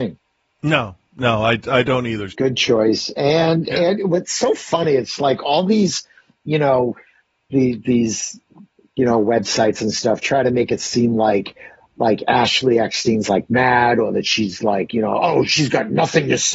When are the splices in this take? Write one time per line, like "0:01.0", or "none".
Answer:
0:02.3

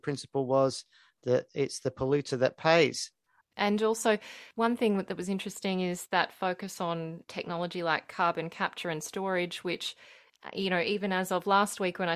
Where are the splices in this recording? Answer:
0:03.4

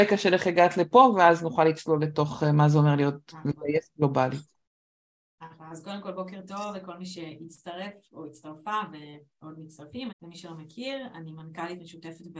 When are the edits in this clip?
0:10.1

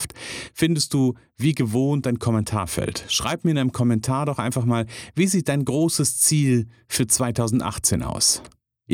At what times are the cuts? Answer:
none

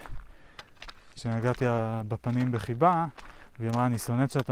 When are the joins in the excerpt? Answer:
0:01.1

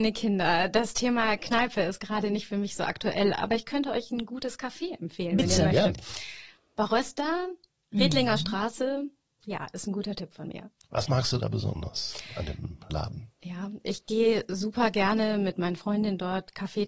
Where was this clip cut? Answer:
0:12.9

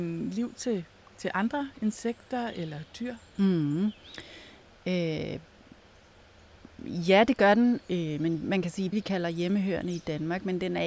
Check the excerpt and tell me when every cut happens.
0:08.9

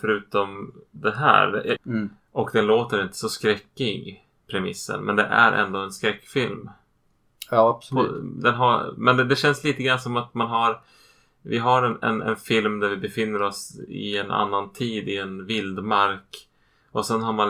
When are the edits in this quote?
0:01.8

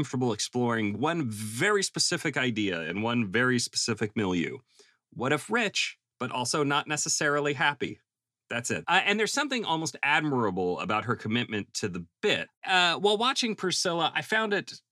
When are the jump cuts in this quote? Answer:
0:08.8
0:12.5

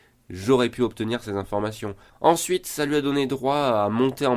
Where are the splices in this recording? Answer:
0:02.1

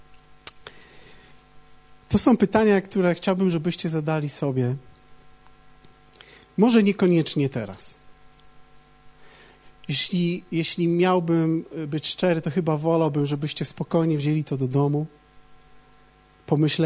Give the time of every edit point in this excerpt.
none

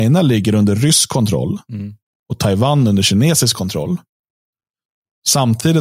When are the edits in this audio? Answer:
none

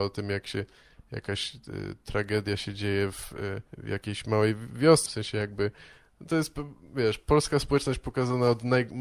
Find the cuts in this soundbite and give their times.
0:03.7
0:05.1

